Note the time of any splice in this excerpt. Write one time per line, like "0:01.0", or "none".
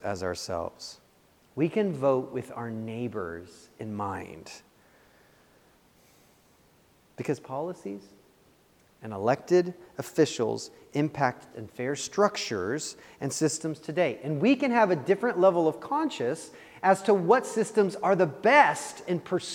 0:11.5